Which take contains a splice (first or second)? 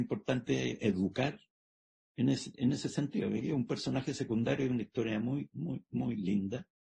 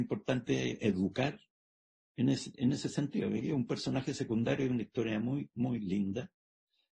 second